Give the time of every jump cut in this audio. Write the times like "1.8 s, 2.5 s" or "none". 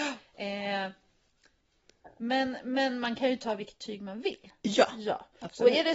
none

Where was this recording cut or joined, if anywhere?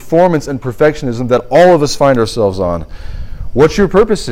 none

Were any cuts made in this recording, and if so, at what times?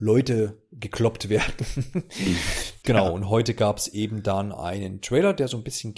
2.8 s

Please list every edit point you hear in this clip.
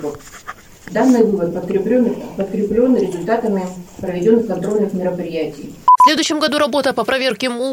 none

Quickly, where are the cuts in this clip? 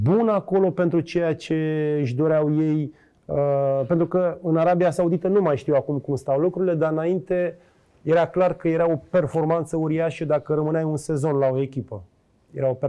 none

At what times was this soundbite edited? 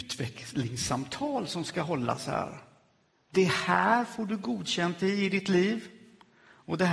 3.1 s

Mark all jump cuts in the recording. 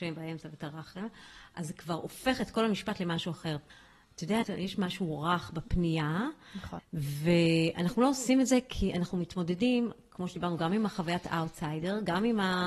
4.4 s, 6.8 s

